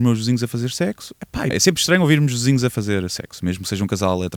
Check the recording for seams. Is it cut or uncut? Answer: cut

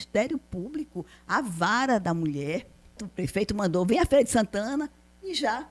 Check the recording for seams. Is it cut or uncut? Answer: cut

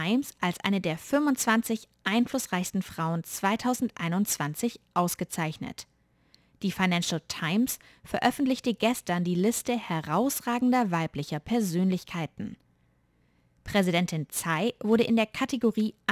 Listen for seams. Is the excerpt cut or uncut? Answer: uncut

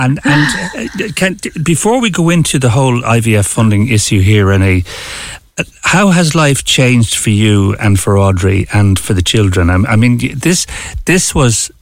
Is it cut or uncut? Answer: uncut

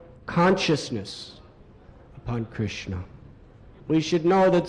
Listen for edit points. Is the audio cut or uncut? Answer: uncut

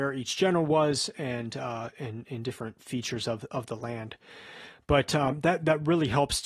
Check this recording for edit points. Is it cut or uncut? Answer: uncut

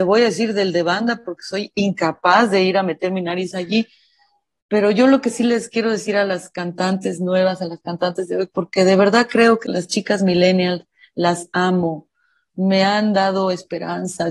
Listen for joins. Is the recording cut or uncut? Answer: cut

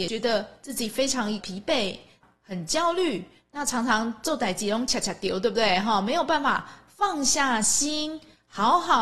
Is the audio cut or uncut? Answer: uncut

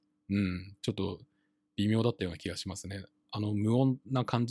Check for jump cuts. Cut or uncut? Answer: uncut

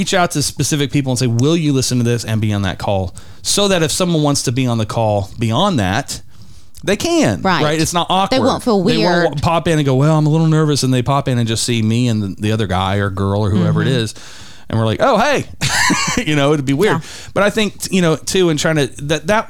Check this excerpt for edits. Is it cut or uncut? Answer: uncut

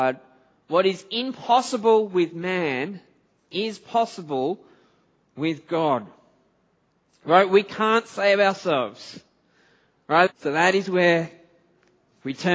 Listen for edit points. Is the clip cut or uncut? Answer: cut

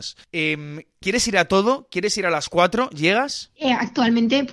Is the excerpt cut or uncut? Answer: uncut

